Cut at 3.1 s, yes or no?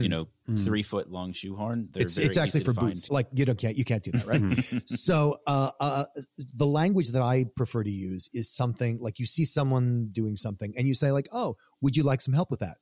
yes